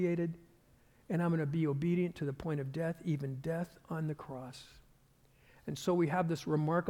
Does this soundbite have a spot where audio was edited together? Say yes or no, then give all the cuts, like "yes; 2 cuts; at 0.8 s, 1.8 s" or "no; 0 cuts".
no; 0 cuts